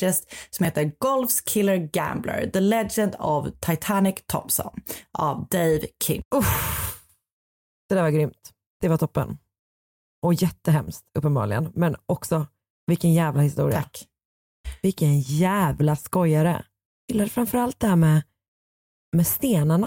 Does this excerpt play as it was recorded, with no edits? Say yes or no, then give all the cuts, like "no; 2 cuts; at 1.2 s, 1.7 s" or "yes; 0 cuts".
yes; 0 cuts